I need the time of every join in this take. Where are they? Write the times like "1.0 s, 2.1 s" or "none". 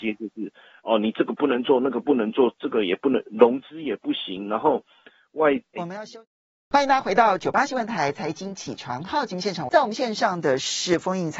5.8 s, 9.7 s